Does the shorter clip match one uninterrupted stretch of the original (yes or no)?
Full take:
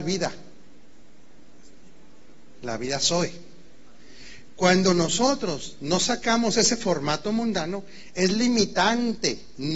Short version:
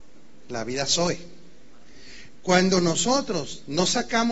yes